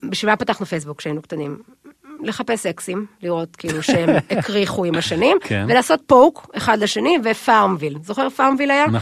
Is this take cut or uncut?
uncut